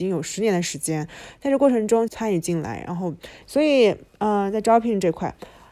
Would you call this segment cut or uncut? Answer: cut